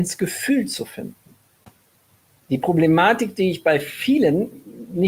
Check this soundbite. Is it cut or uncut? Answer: uncut